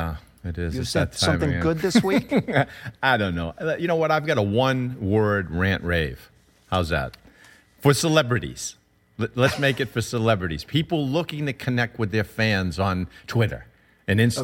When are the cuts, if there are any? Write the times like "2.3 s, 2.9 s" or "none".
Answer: none